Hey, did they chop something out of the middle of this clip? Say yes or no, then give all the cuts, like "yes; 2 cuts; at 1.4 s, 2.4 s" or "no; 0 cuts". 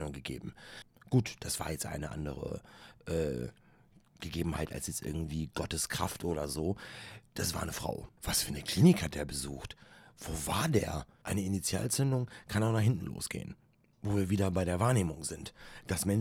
yes; 2 cuts; at 8.2 s, 11.2 s